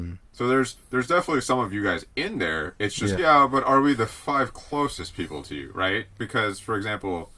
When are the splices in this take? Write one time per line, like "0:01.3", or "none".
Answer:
0:03.2